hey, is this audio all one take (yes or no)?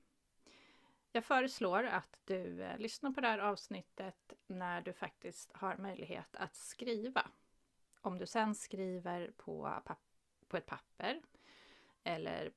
yes